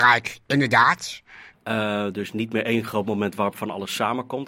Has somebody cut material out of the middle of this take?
yes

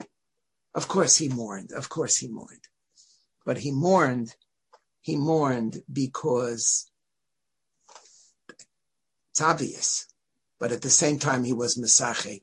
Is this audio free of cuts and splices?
yes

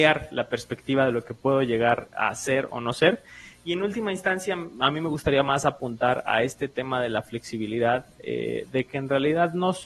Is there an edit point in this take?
no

